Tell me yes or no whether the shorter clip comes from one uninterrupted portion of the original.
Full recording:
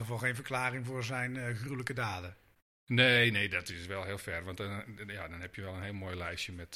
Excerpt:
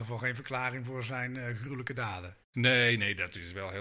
no